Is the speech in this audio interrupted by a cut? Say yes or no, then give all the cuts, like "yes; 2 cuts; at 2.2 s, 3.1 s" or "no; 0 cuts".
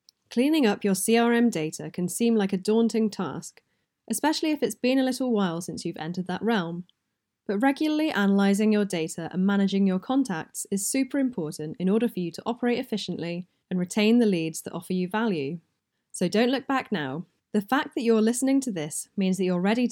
no; 0 cuts